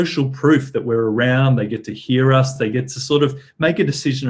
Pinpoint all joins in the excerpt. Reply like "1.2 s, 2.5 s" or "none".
none